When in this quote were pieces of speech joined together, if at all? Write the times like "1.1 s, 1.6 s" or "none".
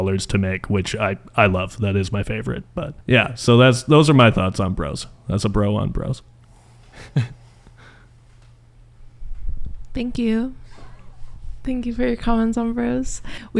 3.0 s